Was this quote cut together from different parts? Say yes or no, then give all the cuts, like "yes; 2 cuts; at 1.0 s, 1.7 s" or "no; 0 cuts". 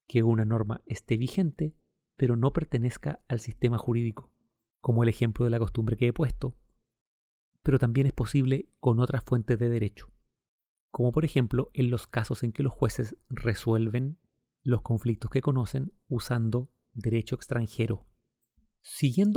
no; 0 cuts